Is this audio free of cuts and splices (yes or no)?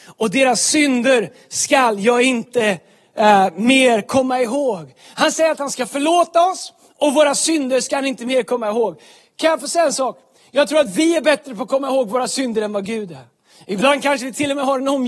yes